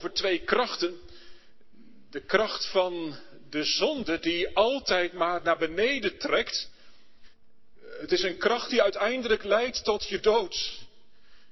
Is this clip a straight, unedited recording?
no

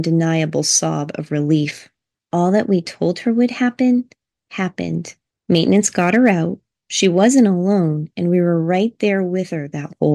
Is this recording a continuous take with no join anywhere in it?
yes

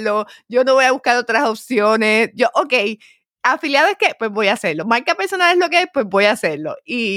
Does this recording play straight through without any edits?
yes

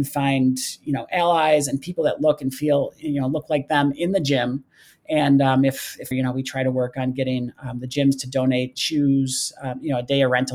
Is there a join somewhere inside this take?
yes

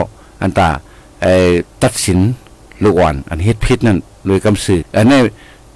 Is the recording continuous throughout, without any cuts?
no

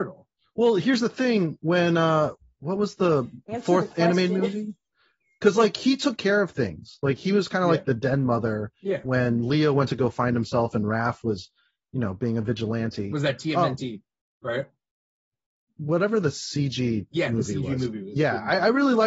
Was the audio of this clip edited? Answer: no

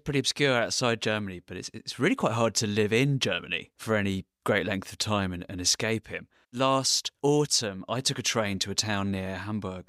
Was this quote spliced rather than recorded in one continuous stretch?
yes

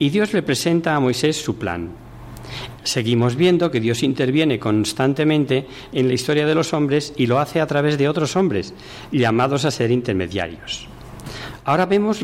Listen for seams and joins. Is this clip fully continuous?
no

